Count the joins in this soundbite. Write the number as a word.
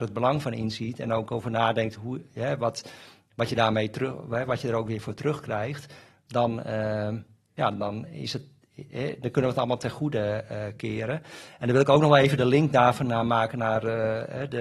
zero